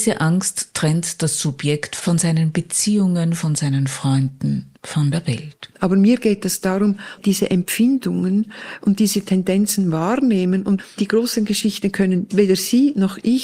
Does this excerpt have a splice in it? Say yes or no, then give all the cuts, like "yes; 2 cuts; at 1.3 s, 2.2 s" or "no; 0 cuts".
yes; 2 cuts; at 5.7 s, 7.2 s